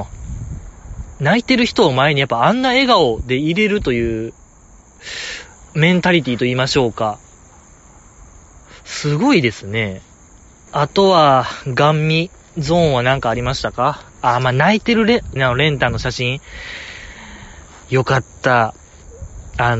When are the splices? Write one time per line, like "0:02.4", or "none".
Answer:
0:10.7
0:14.1
0:15.4